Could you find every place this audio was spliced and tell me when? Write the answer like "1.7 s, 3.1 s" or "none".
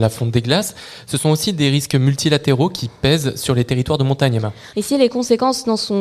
4.7 s